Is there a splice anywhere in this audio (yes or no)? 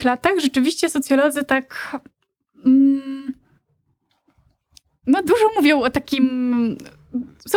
no